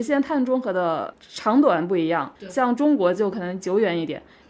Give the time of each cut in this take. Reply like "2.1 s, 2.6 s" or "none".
2.4 s